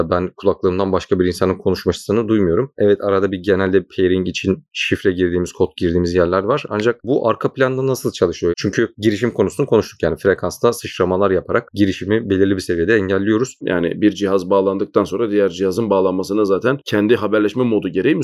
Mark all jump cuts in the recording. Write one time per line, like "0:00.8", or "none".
0:08.5
0:13.6